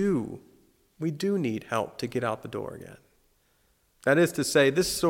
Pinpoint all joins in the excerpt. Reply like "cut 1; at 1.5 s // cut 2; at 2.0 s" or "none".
cut 1; at 3.9 s